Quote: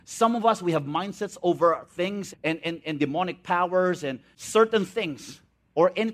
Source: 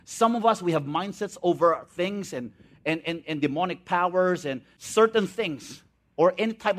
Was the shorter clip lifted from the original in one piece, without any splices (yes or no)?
no